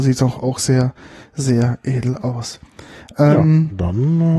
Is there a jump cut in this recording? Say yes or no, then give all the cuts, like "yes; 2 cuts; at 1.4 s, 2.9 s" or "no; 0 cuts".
no; 0 cuts